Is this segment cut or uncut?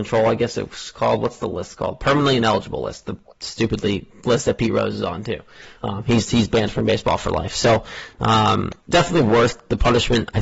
cut